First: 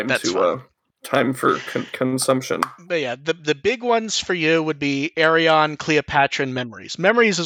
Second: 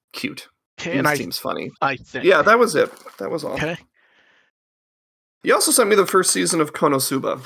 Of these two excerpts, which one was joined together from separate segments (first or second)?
second